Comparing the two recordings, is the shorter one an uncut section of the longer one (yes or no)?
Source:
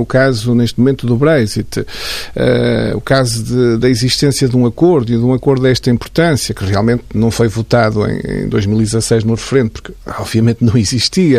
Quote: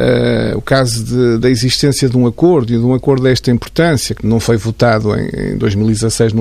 no